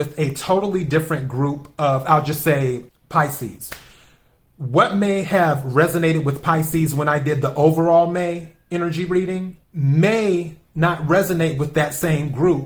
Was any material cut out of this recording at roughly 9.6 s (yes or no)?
yes